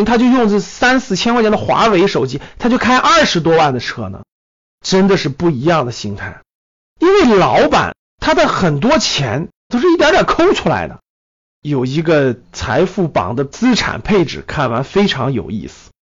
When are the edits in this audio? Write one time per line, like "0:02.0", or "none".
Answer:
0:09.7
0:11.6